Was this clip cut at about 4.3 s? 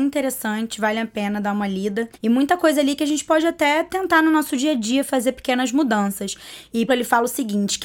no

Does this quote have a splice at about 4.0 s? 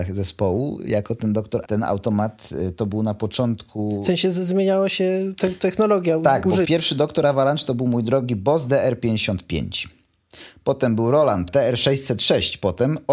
no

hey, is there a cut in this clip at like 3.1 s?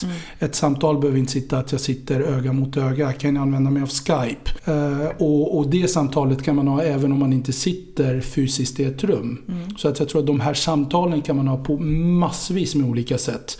no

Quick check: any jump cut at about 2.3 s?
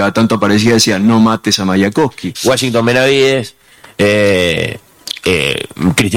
yes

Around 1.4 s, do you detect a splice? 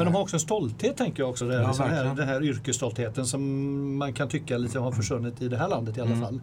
no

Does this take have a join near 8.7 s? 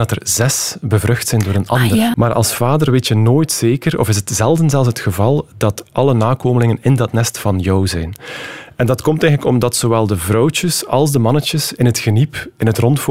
no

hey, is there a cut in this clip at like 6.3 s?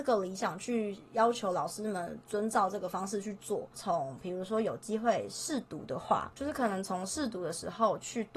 no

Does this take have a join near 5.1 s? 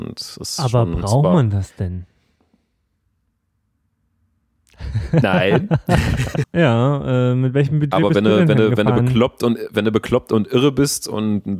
no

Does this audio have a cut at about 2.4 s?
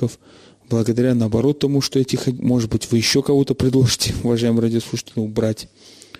yes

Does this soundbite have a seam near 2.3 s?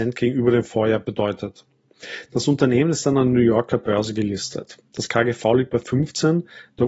yes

